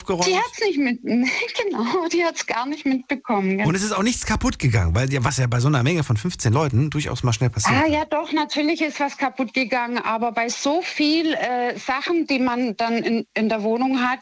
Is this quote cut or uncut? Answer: uncut